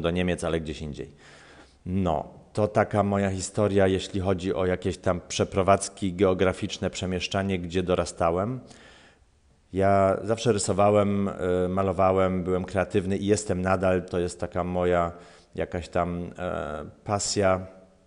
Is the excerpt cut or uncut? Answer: cut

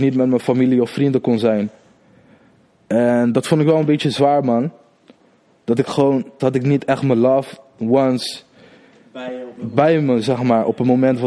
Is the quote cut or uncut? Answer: cut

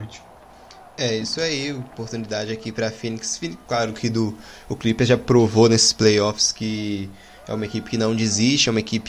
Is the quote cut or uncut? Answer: cut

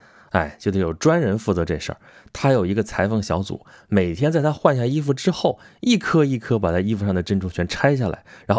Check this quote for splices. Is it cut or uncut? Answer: uncut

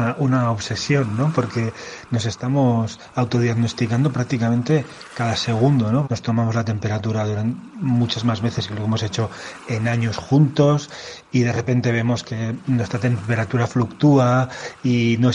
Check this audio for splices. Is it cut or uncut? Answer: cut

